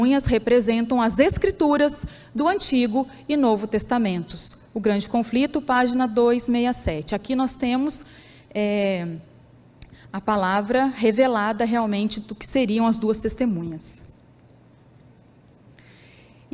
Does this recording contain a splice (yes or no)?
no